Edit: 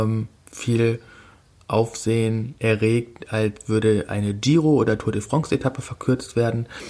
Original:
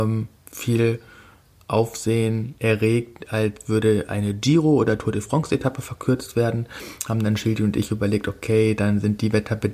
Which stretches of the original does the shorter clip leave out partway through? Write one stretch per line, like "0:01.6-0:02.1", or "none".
none